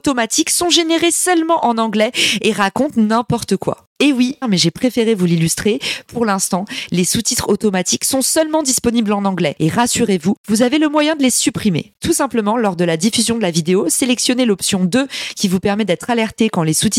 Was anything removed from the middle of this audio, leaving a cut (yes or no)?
yes